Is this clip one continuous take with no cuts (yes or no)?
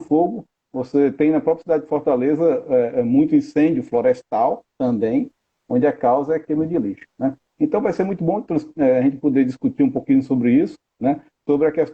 yes